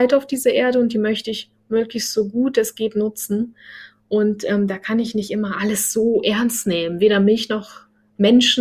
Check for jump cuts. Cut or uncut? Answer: uncut